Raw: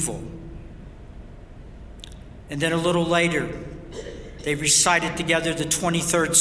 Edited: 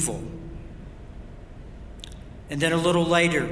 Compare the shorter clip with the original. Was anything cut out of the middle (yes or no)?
no